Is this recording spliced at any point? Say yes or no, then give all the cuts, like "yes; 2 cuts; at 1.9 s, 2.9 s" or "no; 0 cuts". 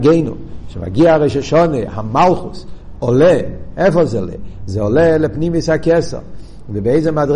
no; 0 cuts